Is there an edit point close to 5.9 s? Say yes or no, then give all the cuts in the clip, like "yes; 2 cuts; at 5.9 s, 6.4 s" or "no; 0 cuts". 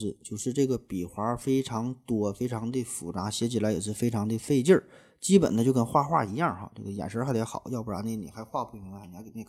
no; 0 cuts